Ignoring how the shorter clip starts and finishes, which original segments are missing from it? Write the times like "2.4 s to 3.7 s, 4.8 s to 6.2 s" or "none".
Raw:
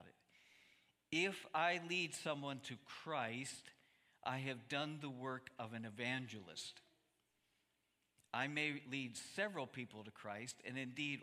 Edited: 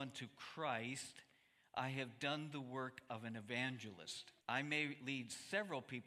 6.9 s to 8.3 s